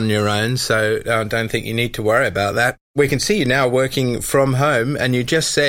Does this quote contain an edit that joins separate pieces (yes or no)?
no